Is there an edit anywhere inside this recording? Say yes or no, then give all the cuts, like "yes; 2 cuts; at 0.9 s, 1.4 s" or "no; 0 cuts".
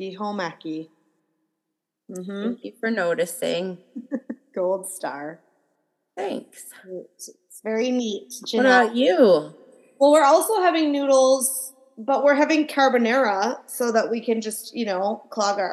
no; 0 cuts